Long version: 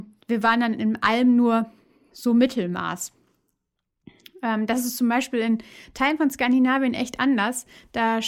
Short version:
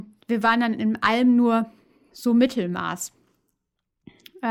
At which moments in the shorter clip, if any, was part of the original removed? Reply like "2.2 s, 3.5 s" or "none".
none

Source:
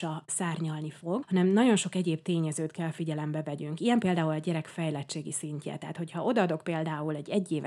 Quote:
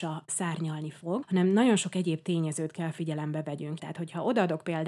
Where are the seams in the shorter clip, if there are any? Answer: 3.8 s

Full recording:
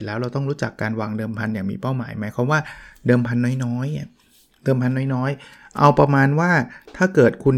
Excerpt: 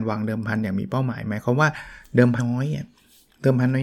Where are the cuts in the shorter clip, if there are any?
2.4 s

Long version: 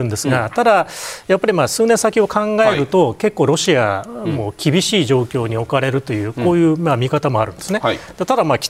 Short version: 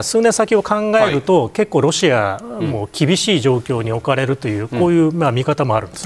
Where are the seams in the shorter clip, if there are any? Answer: none

